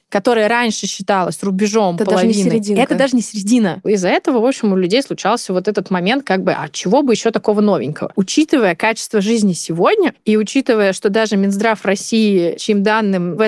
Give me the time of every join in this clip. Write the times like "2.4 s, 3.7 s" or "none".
3.8 s